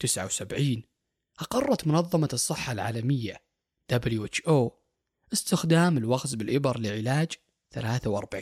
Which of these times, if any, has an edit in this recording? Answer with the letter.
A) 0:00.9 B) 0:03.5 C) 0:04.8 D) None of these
D